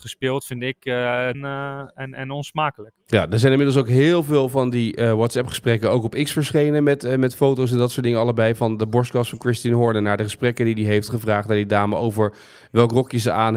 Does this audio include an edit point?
yes; 1 cut; at 1.3 s

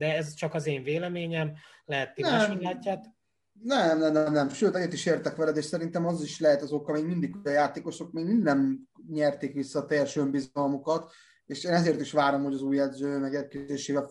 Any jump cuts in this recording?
no; 0 cuts

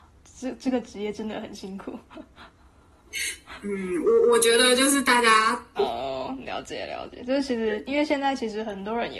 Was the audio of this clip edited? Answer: yes; 1 cut; at 5.8 s

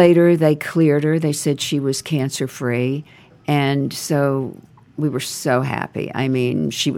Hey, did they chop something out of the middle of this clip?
no; 0 cuts

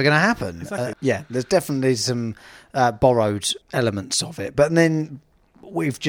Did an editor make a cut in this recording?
yes; 2 cuts; at 0.9 s, 3.6 s

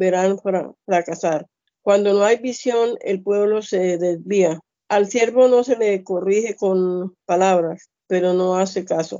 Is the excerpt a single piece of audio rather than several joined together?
no; 3 cuts; at 1.7 s, 4.7 s, 8.0 s

